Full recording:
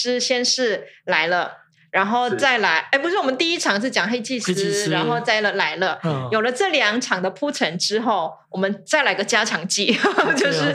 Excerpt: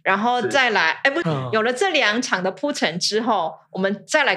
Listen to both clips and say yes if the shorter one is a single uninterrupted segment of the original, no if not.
no